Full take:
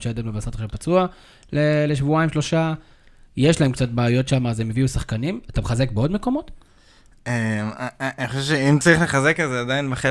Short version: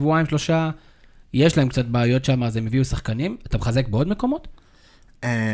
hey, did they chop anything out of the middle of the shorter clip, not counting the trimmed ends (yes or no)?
no